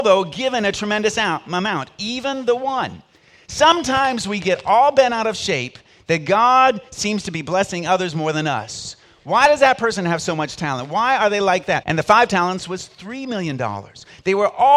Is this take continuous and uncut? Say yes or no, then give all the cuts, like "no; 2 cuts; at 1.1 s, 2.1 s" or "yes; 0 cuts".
no; 1 cut; at 11.8 s